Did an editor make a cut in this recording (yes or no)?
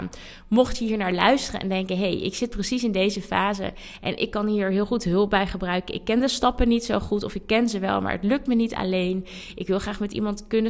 no